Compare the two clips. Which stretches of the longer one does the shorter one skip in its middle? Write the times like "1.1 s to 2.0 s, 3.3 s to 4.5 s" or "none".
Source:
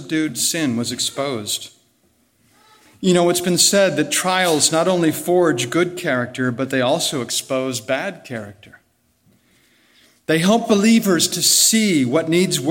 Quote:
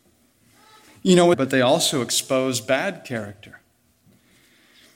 3.3 s to 6.5 s

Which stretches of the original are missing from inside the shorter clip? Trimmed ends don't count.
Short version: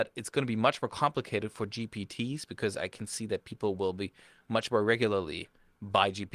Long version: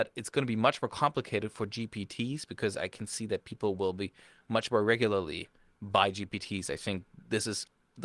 none

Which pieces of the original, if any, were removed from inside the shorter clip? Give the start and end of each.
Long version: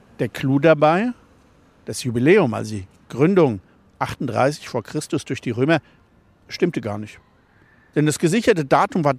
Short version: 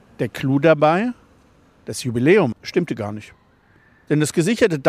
2.5 s to 6.4 s

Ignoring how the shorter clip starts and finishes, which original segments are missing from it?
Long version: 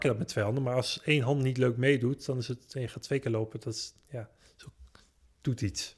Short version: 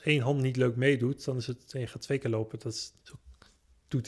4.0 s to 4.5 s

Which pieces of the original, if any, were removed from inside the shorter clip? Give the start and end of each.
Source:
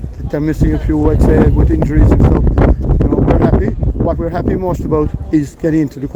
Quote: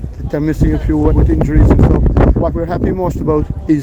1.1 s to 1.5 s, 2.8 s to 4.0 s

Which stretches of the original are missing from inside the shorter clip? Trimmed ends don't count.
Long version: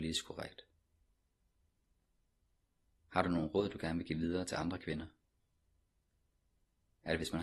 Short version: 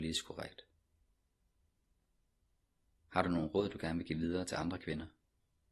none

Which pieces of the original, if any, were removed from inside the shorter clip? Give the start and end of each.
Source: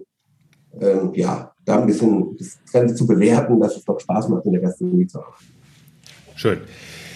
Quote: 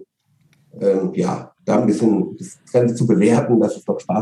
none

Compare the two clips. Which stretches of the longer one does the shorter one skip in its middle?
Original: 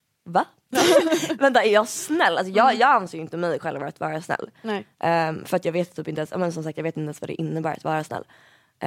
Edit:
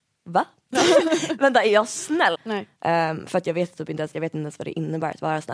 2.3 s to 4.5 s, 6.3 s to 6.7 s

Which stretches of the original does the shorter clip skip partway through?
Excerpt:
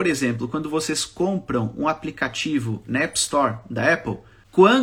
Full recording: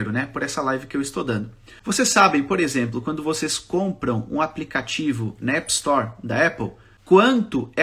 none

